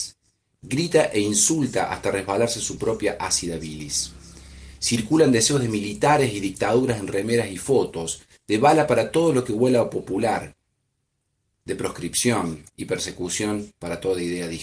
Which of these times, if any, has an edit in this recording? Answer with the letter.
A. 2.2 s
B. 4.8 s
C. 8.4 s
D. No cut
D